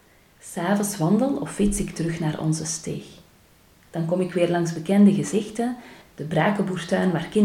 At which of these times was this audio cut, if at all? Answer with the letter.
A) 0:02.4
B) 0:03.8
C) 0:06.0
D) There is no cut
C